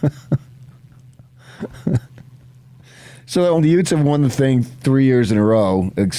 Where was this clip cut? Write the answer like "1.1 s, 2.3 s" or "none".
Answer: 3.6 s